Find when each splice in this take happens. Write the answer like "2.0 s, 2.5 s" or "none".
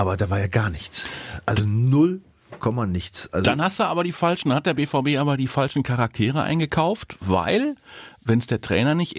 none